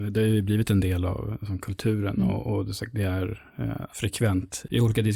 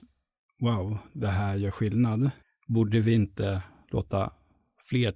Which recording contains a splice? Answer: first; 1 cut; at 3.9 s

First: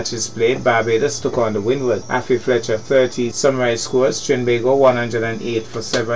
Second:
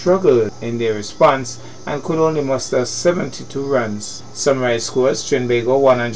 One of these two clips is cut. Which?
first; 2 cuts; at 2.0 s, 3.3 s

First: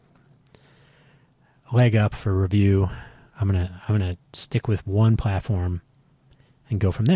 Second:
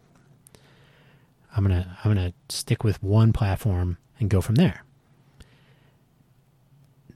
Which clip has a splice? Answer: second; 2 cuts; at 1.4 s, 4.1 s

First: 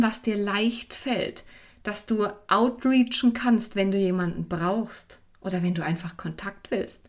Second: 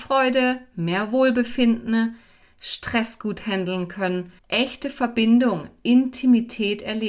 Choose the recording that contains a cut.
second; 2 cuts; at 2.4 s, 4.4 s

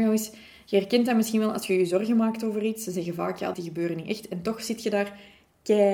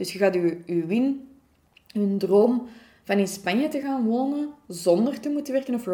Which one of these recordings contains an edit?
first; 1 cut; at 3.5 s

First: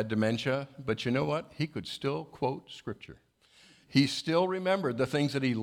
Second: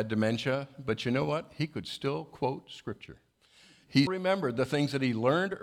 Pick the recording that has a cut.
second; 1 cut; at 4.1 s

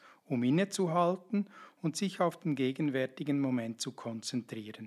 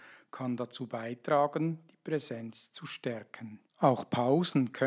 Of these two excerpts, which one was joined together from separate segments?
second; 1 cut; at 3.7 s

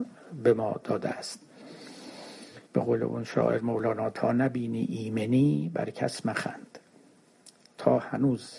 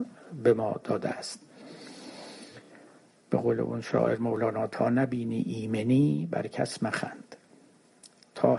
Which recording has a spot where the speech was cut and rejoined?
first; 1 cut; at 2.7 s

